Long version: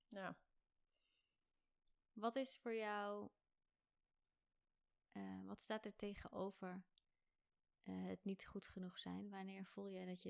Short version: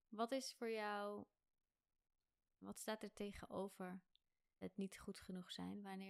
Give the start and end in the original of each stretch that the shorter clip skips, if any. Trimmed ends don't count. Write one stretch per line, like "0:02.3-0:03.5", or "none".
0:04.7-0:05.4
0:07.4-0:08.1

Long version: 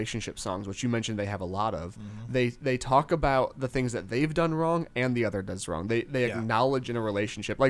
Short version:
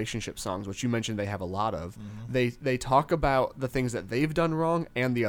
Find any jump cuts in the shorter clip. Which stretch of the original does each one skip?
none

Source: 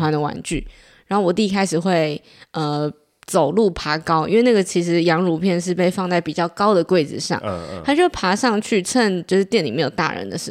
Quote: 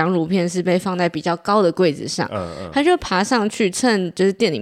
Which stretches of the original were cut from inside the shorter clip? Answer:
none

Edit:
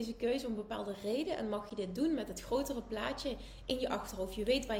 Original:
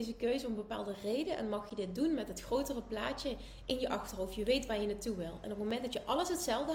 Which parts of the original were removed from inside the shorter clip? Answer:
none

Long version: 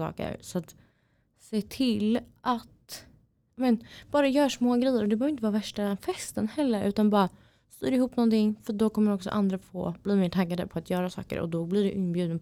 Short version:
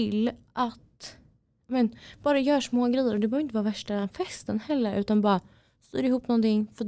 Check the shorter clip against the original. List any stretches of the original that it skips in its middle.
none

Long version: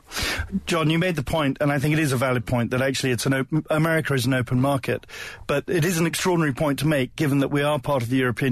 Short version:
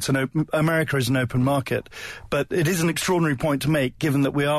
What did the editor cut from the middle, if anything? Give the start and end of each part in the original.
none

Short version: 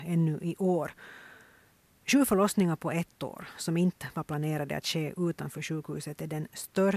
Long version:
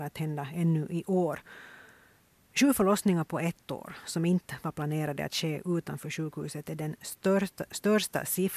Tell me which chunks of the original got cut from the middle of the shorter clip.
none

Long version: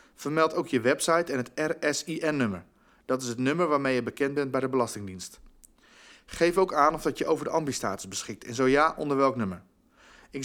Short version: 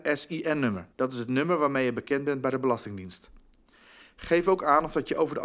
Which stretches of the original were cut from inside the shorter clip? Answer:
0:02.7-0:03.0

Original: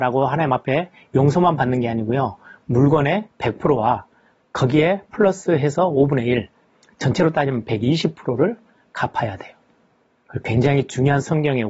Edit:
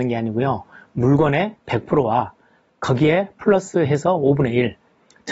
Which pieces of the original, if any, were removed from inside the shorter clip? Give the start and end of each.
none

